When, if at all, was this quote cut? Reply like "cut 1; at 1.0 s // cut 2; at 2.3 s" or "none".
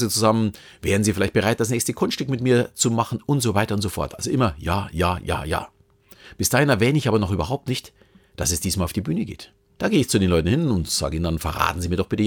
cut 1; at 9.8 s